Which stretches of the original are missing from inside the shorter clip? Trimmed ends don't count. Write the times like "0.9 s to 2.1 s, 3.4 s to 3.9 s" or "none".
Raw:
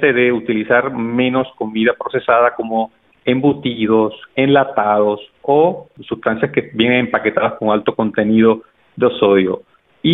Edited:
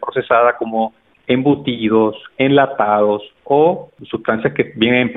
none